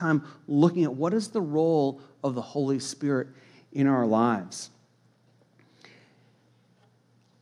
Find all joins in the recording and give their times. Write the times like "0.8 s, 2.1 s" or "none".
none